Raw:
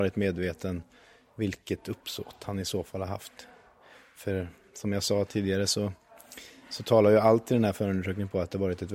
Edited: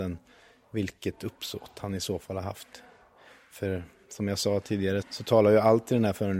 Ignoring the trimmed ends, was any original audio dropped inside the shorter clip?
yes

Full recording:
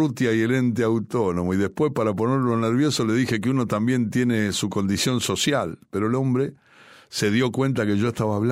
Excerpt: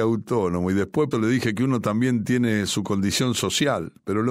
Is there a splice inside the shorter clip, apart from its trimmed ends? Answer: yes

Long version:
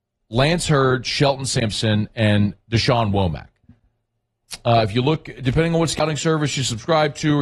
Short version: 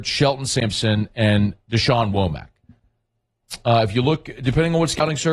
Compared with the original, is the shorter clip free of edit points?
yes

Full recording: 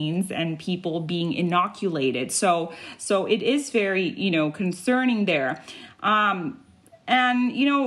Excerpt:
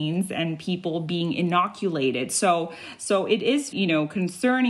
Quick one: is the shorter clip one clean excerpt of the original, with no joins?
no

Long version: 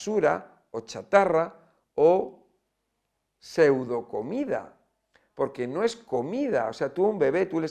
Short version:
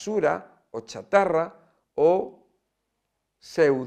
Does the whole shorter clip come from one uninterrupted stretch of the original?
yes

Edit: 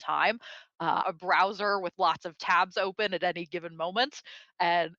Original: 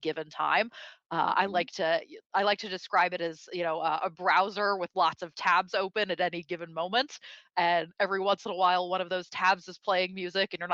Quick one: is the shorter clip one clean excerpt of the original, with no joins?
no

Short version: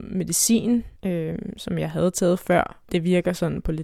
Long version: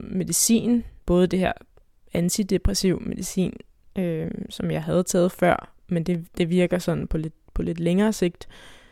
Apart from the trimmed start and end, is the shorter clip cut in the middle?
yes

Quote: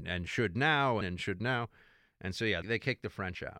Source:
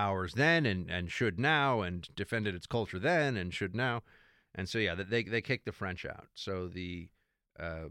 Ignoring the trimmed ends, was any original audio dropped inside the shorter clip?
yes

